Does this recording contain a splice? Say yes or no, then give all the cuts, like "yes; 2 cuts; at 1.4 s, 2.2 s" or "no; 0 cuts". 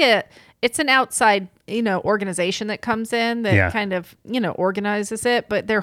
no; 0 cuts